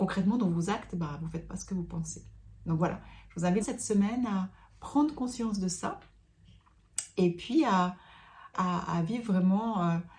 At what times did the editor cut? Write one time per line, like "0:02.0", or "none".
0:03.6
0:08.5